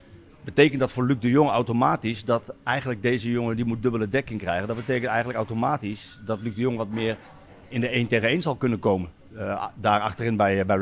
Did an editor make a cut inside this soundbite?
no; 0 cuts

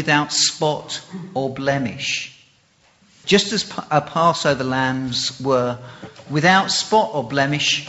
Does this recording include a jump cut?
yes; 1 cut; at 3.2 s

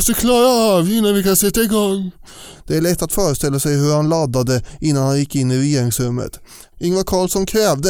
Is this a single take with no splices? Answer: no; 2 cuts; at 2.5 s, 6.7 s

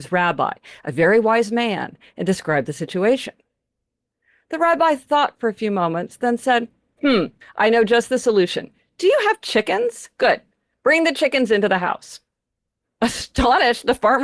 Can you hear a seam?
yes; 1 cut; at 12.8 s

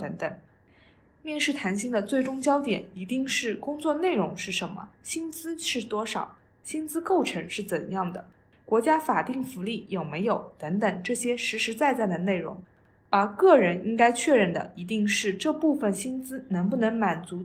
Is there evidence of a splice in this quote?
no; 0 cuts

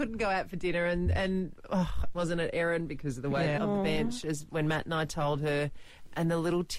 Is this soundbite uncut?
no; 2 cuts; at 2.1 s, 3.6 s

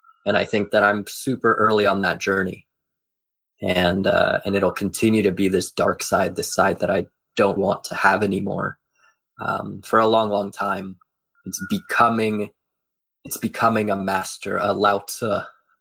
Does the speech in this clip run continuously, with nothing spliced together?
no; 2 cuts; at 7.6 s, 11.4 s

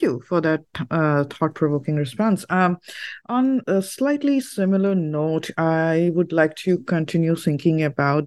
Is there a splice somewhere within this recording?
yes; 1 cut; at 3.6 s

